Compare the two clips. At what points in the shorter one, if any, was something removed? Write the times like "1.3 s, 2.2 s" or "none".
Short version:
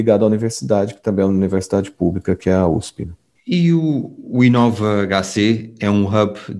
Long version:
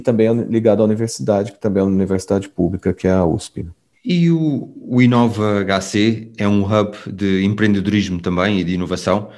none